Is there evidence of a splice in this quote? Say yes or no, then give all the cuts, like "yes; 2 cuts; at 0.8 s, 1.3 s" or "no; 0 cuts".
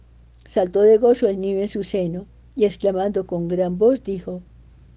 yes; 1 cut; at 2.4 s